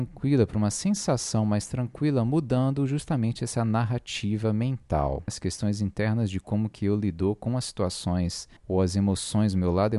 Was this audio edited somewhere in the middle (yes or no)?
yes